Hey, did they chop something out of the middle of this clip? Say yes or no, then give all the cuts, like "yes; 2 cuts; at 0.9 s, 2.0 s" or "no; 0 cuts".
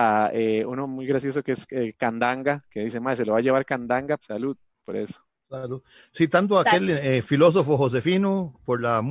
yes; 1 cut; at 4.2 s